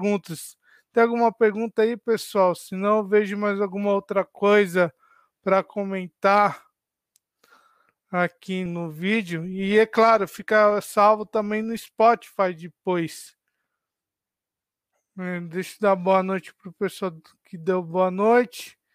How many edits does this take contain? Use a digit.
1